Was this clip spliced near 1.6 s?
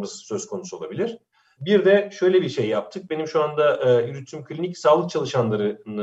yes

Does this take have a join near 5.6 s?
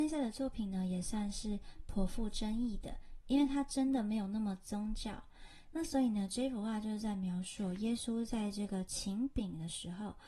yes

